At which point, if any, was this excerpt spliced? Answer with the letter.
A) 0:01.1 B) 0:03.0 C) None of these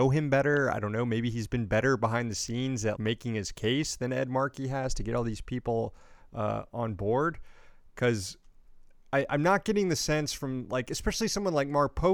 B